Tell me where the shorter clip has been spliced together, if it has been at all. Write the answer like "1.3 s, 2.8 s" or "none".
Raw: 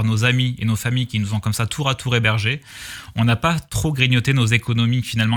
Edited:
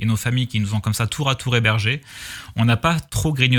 none